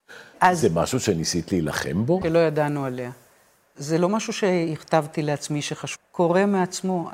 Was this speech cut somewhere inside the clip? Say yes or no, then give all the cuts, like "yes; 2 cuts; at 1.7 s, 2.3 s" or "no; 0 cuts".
yes; 2 cuts; at 2.2 s, 6.0 s